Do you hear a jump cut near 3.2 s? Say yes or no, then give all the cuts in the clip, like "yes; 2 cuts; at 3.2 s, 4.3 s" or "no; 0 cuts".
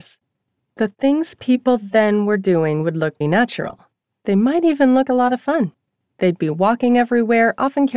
yes; 2 cuts; at 3.2 s, 5.1 s